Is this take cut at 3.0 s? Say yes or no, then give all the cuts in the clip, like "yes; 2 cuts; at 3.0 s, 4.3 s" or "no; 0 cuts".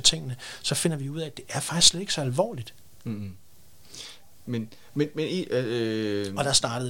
no; 0 cuts